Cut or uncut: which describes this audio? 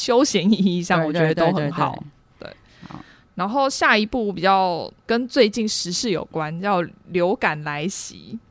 uncut